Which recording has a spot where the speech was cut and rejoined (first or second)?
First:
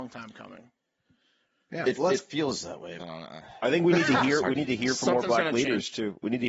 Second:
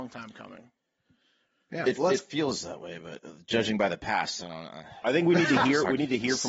first